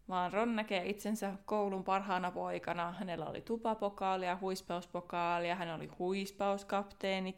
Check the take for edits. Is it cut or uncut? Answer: uncut